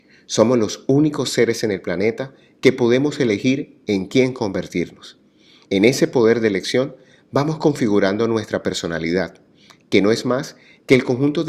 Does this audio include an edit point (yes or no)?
yes